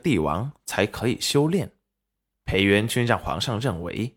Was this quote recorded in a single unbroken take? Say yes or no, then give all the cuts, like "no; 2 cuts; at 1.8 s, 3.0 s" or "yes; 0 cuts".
no; 1 cut; at 2.3 s